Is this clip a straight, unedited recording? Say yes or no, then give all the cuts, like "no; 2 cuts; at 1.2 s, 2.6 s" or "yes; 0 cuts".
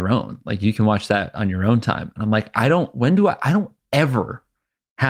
yes; 0 cuts